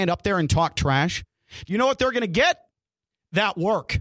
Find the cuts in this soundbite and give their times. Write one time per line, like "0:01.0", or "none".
0:01.7